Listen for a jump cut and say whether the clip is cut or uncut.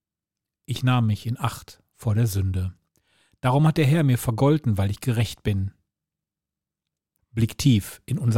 cut